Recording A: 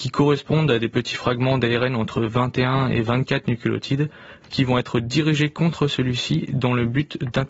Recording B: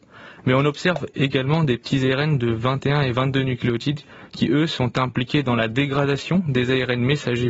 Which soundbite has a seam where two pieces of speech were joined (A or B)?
A